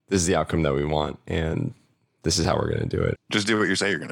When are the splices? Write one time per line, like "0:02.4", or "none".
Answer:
0:03.1

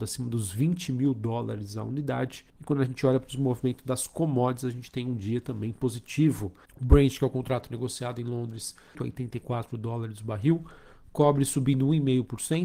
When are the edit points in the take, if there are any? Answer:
0:02.5
0:06.7
0:09.0

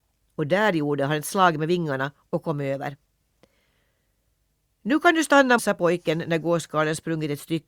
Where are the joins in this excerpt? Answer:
0:05.6

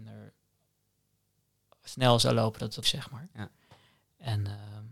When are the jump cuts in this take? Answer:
0:02.8

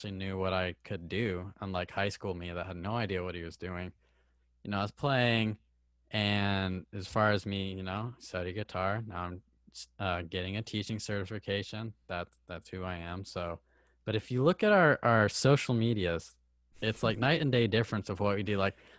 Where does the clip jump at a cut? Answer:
none

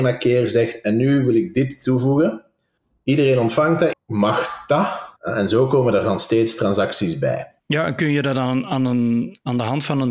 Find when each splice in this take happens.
0:03.9
0:05.2
0:07.6

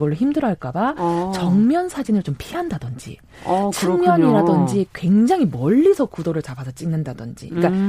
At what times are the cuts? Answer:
none

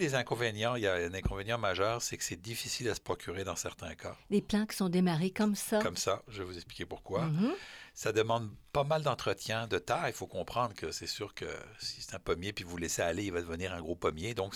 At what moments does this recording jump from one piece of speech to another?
none

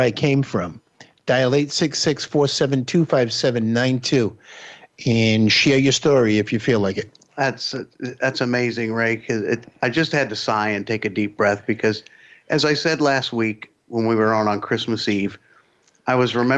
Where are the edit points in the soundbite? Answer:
none

